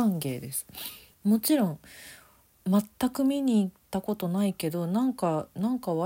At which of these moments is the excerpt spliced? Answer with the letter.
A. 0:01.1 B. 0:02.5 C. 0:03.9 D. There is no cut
A